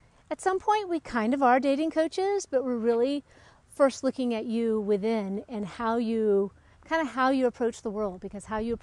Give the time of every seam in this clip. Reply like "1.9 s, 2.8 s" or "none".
6.7 s